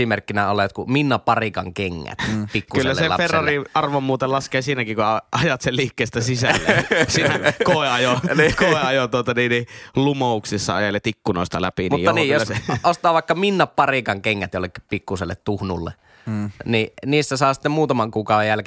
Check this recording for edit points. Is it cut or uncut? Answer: uncut